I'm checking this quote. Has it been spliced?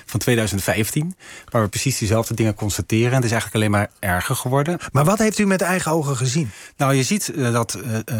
no; 0 cuts

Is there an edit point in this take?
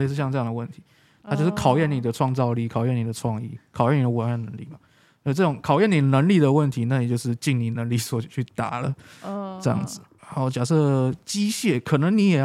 yes; 1 cut; at 10.2 s

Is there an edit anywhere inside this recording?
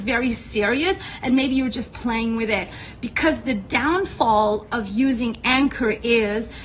no; 0 cuts

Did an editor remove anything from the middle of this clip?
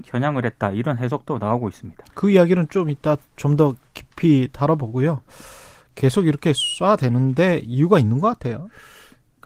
no; 0 cuts

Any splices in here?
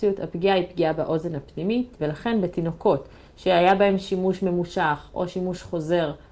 yes; 1 cut; at 2.0 s

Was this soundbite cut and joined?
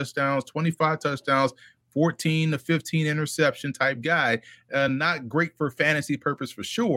no; 0 cuts

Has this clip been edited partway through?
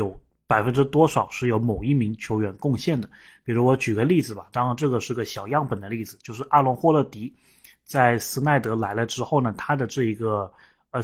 no; 0 cuts

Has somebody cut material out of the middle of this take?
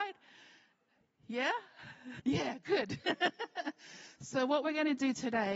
yes; 1 cut; at 2.2 s

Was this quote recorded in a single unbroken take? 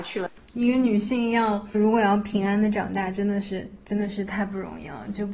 no; 1 cut; at 1.7 s

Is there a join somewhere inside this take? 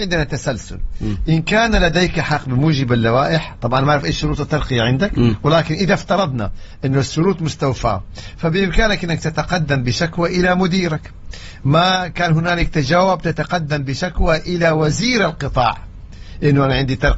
no; 0 cuts

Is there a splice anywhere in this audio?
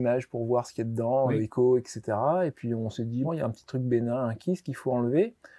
yes; 1 cut; at 3.2 s

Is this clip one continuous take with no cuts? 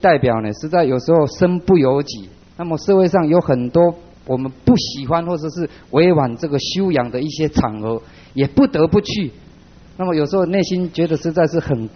yes; 0 cuts

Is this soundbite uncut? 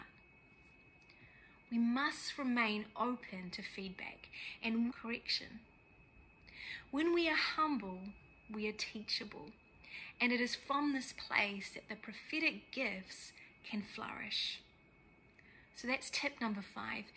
no; 1 cut; at 4.9 s

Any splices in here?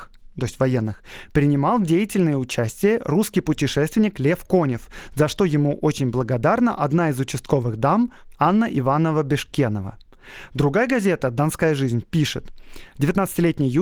no; 0 cuts

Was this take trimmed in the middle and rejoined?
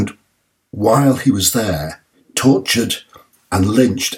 yes; 1 cut; at 2.1 s

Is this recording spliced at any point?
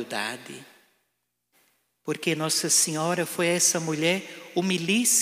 no; 0 cuts

